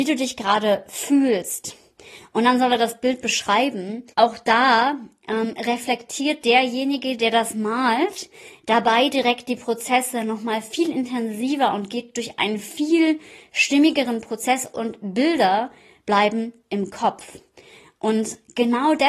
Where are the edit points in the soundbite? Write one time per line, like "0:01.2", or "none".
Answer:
0:04.1